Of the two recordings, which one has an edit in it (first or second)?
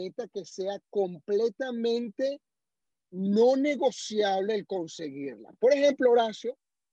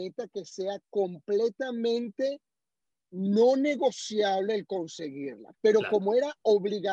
second